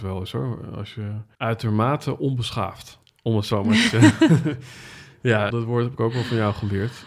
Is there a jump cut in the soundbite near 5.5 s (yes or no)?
yes